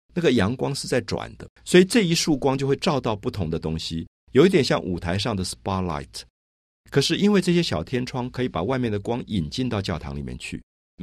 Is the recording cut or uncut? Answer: cut